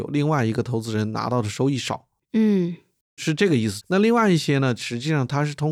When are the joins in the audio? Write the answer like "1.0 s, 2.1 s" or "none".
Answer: 3.8 s